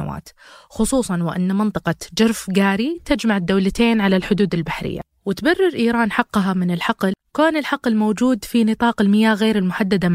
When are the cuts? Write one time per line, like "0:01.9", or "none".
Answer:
none